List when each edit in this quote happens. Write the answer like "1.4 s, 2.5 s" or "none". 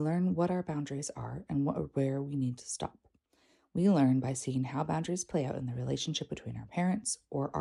none